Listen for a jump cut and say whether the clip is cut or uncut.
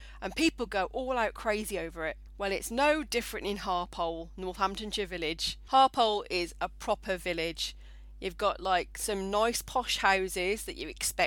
uncut